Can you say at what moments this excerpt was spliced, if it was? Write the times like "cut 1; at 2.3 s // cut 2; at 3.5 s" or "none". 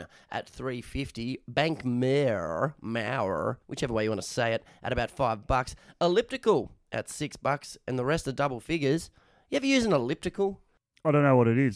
cut 1; at 3.6 s

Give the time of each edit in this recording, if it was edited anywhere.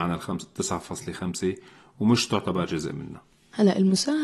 none

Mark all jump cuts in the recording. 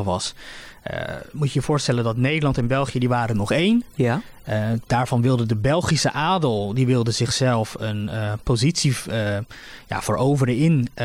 none

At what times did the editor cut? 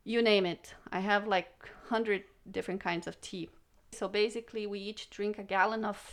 cut 1; at 3.9 s

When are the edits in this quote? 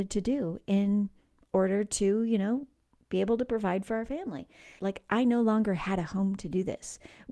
cut 1; at 4.8 s

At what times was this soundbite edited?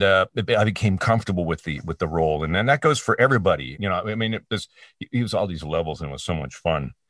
cut 1; at 3.7 s

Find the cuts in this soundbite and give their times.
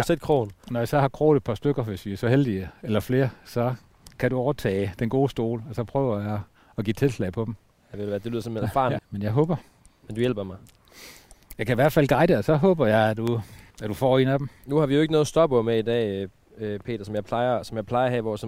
cut 1; at 9.0 s // cut 2; at 13.7 s

